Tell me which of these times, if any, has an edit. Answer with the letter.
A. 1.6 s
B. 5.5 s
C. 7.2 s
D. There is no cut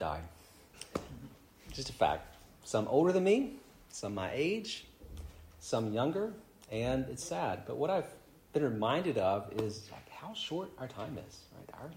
C